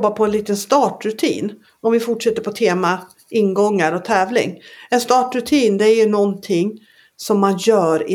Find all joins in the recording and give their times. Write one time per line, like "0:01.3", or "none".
none